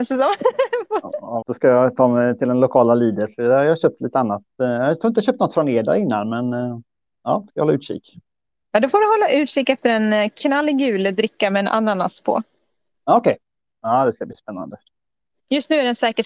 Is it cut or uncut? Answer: cut